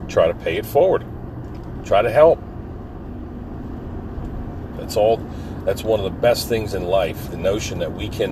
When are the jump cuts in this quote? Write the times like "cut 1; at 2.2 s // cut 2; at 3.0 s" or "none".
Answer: cut 1; at 4.7 s